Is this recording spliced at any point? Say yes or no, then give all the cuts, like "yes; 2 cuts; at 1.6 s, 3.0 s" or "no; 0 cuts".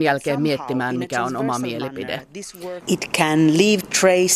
yes; 1 cut; at 2.8 s